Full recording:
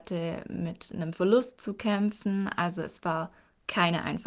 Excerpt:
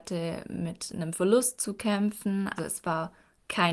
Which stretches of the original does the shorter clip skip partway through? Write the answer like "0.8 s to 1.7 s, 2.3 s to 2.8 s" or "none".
2.6 s to 2.7 s